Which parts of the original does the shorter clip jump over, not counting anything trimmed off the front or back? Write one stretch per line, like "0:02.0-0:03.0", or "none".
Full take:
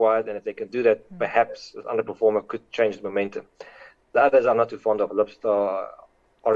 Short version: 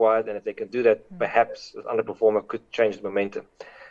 none